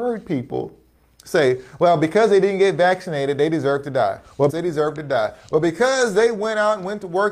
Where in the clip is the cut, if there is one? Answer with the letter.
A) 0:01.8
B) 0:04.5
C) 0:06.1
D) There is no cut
B